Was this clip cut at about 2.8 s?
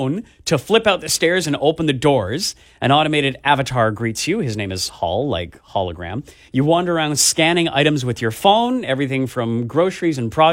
no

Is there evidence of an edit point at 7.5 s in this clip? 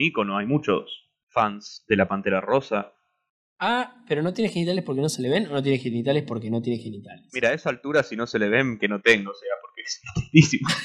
no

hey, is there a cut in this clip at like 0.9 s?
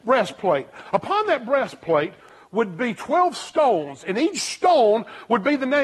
no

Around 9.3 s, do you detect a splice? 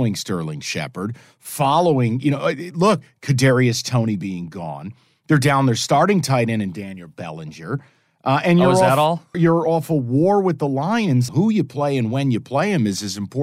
yes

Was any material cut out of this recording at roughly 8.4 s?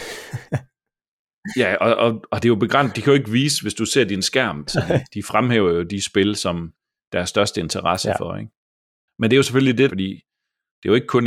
no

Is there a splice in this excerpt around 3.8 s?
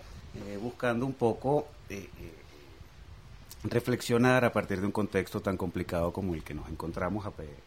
no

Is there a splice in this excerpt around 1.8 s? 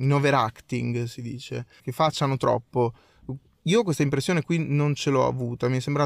yes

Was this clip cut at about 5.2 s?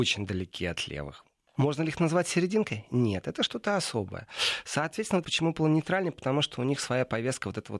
yes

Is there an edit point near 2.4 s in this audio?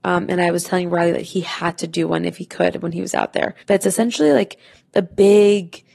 no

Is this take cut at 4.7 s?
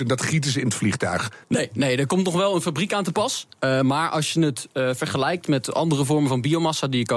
no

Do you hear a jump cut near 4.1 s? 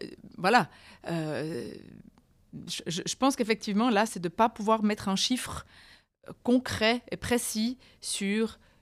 yes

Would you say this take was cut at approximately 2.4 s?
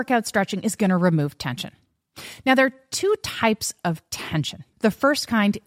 no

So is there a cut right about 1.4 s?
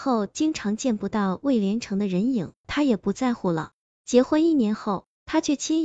no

